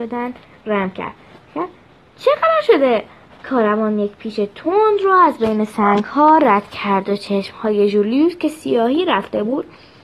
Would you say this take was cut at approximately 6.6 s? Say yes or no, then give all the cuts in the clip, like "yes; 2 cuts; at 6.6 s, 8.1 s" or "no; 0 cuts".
no; 1 cut; at 3.4 s